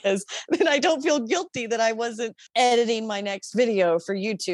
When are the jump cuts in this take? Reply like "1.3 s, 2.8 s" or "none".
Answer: 2.5 s